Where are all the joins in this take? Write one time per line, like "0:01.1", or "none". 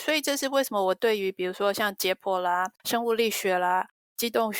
0:02.7